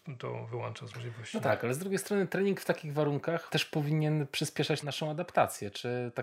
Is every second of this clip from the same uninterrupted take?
yes; 0 cuts

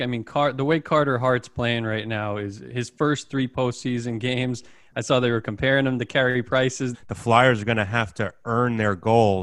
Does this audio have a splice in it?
yes; 1 cut; at 6.9 s

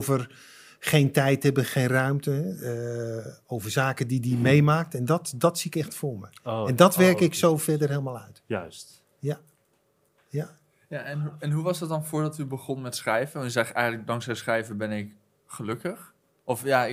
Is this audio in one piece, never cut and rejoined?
yes; 0 cuts

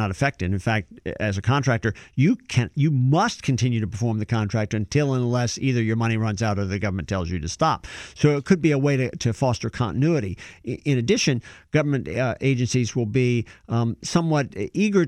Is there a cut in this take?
no; 0 cuts

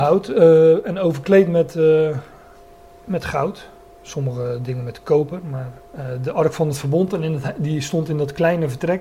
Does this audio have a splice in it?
no; 0 cuts

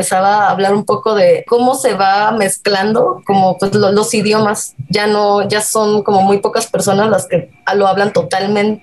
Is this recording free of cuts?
yes; 0 cuts

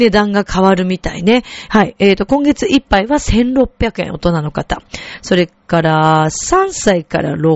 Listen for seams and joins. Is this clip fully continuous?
no; 1 cut; at 1.7 s

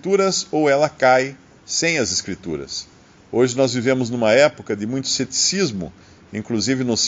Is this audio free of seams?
yes; 0 cuts

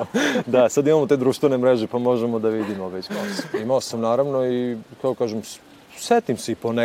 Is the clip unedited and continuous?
no; 1 cut; at 3.1 s

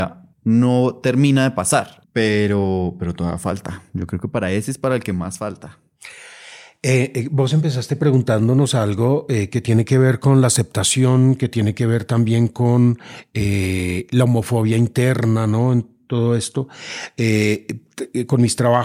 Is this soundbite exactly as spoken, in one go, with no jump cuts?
no; 1 cut; at 2.0 s

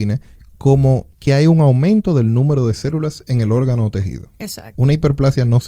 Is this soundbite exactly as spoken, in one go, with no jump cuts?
no; 2 cuts; at 1.1 s, 4.7 s

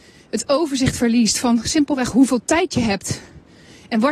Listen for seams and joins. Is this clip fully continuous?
yes; 0 cuts

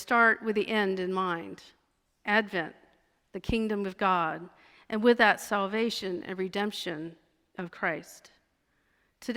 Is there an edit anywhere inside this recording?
no; 0 cuts

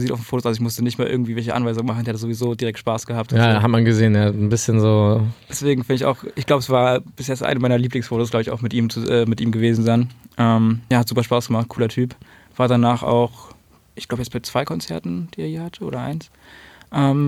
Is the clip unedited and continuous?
yes; 0 cuts

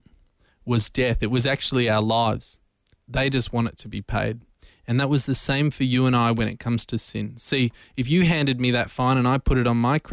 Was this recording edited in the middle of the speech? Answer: yes; 1 cut; at 2.9 s

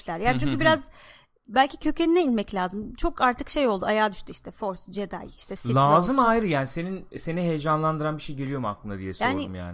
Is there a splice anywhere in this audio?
no; 0 cuts

